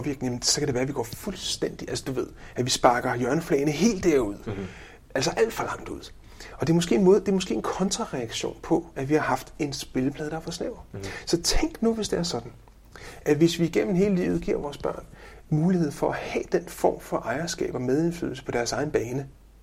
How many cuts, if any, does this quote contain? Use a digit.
0